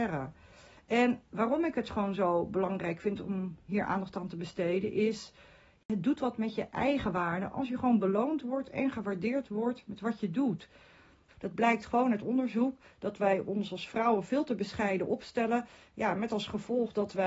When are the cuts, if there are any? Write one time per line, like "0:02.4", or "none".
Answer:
0:11.3

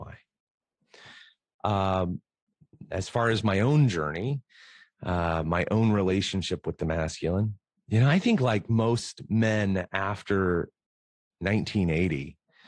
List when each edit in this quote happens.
none

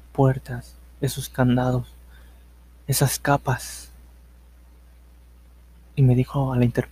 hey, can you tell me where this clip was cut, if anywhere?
none

